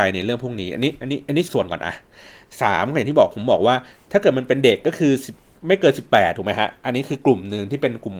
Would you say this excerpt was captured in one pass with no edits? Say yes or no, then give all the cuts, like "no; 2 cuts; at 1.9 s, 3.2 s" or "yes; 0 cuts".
no; 1 cut; at 1.5 s